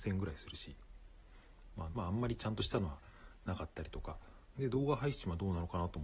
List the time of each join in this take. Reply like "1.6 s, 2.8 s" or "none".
1.9 s, 4.5 s